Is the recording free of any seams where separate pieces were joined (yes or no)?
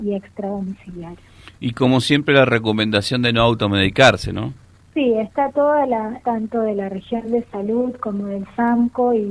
no